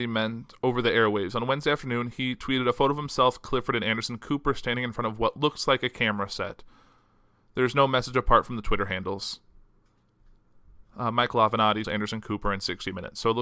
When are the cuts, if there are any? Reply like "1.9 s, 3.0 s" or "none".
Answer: 11.8 s